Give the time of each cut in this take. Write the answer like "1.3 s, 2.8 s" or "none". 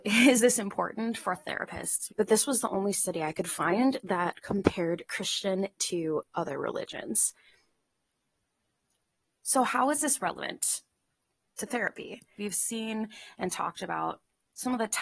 2.1 s, 12.4 s